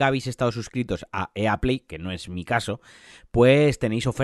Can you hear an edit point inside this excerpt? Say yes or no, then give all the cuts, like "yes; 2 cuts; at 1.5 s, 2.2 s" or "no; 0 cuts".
no; 0 cuts